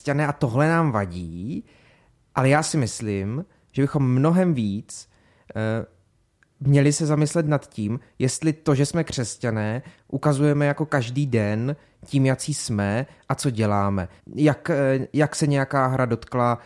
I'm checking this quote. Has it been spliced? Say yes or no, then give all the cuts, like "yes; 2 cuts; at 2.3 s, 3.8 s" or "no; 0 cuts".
yes; 1 cut; at 14.2 s